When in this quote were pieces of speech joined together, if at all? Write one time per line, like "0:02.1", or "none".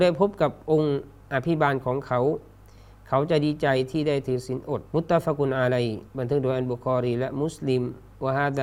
0:04.9
0:06.1

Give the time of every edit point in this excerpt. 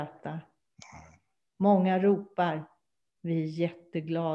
0:01.5
0:03.0

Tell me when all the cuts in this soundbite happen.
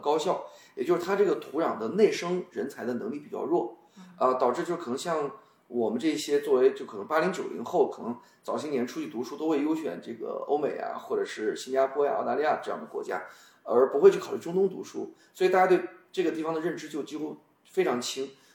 none

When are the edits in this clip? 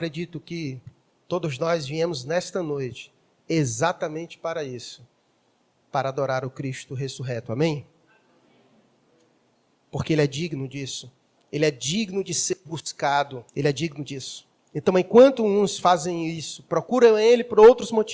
0:11.4
0:13.5

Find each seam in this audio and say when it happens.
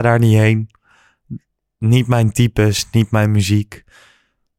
none

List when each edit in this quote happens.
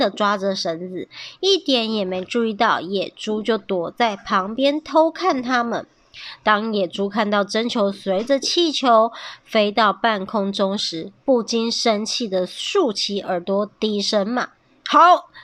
none

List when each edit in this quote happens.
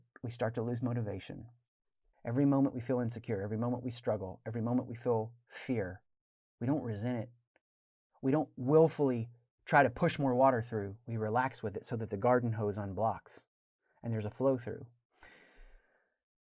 0:02.1

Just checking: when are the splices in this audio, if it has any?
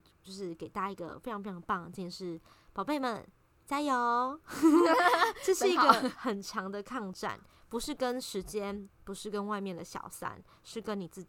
none

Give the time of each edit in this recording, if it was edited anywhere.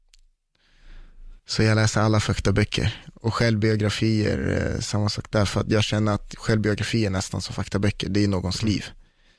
0:01.4

